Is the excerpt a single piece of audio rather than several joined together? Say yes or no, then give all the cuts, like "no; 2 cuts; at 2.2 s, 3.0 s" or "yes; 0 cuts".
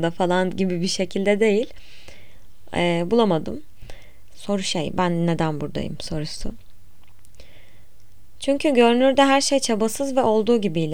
no; 1 cut; at 4.3 s